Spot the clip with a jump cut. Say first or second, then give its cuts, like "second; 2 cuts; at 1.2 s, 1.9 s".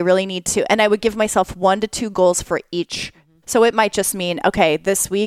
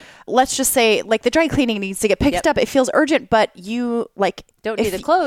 first; 1 cut; at 3.4 s